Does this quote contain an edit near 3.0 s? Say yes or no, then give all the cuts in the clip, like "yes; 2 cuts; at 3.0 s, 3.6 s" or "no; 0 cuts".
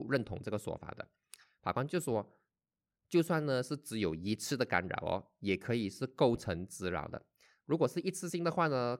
no; 1 cut; at 7.6 s